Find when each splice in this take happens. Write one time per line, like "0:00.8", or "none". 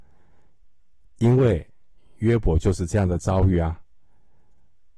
none